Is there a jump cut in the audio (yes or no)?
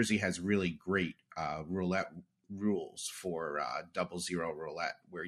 no